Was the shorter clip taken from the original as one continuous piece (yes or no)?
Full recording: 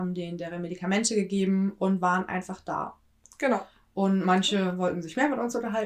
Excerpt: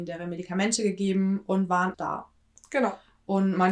no